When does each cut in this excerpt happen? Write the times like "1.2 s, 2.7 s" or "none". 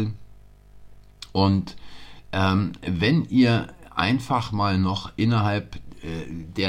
none